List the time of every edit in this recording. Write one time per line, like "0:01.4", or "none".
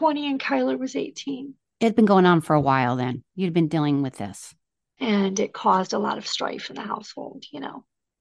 0:04.9